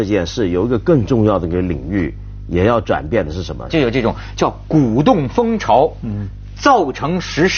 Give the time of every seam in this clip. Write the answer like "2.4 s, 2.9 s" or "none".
3.7 s